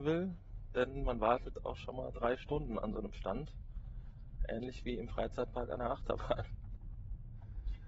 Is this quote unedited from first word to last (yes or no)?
yes